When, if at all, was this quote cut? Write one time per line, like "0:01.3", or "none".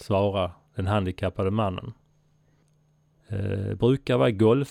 0:03.1